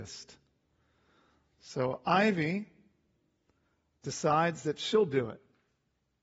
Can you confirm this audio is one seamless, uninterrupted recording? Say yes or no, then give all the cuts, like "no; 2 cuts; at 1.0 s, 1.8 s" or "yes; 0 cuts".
yes; 0 cuts